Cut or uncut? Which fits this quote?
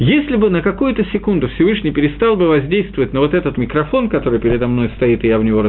cut